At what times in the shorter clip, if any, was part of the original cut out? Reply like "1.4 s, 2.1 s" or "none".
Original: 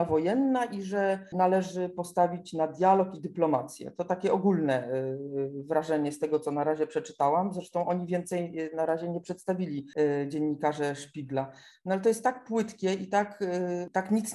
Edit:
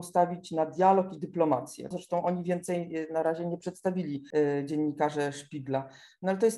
1.9 s